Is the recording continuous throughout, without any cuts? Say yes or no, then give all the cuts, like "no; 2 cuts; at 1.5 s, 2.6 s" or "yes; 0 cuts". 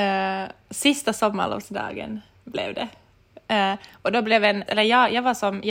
no; 1 cut; at 4.7 s